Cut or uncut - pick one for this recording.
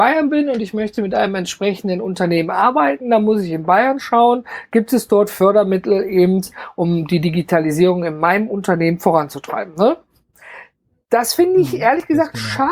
uncut